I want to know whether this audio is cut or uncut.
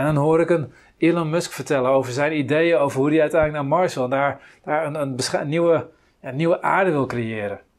uncut